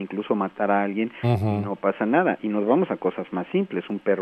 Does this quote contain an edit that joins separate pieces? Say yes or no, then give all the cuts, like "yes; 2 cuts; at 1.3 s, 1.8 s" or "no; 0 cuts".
no; 0 cuts